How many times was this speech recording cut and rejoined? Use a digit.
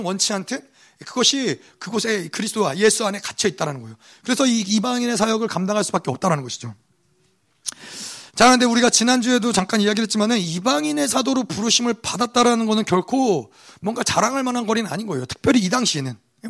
1